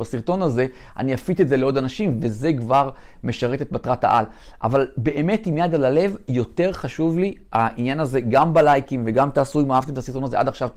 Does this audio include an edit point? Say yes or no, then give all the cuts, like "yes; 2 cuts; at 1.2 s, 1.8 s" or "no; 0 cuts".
no; 0 cuts